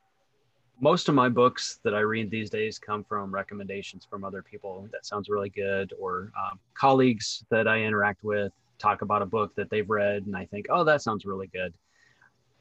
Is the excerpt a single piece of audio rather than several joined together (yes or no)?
no